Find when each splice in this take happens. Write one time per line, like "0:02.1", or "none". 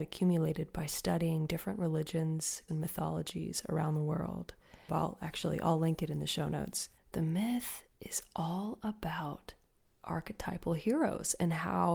0:02.7
0:04.9
0:07.0